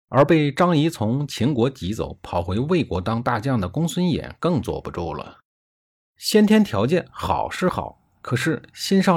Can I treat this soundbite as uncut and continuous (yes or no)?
no